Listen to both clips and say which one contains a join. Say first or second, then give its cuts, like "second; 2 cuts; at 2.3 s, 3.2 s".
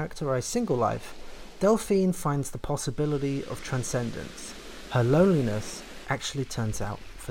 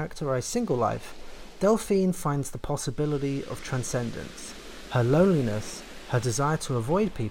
first; 1 cut; at 6.0 s